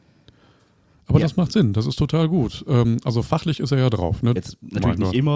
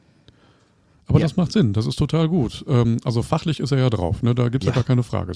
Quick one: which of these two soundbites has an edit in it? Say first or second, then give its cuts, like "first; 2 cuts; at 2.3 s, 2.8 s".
first; 1 cut; at 4.4 s